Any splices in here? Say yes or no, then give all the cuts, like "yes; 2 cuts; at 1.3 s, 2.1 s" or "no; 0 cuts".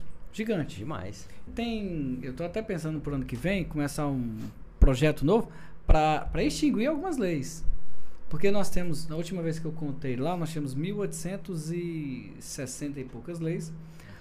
yes; 1 cut; at 1.5 s